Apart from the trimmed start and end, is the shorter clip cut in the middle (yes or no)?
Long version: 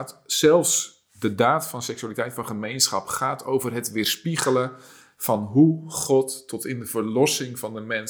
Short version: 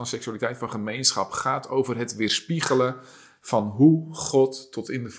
no